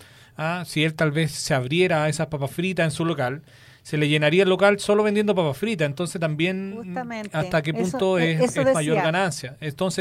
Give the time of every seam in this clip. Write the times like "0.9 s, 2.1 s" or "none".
none